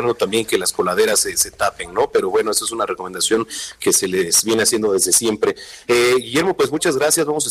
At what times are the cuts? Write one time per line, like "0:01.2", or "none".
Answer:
none